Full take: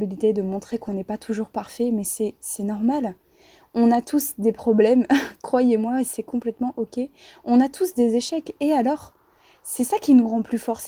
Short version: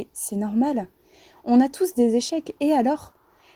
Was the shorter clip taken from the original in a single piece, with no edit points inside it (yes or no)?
no